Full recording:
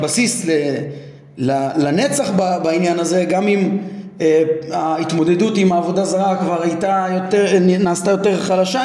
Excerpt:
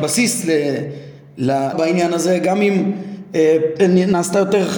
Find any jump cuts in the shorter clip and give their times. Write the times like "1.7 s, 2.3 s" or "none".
1.7 s, 3.8 s